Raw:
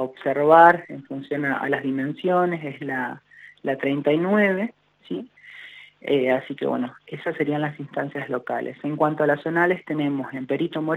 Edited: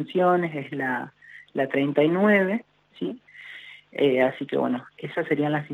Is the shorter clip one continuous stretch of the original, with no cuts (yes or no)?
yes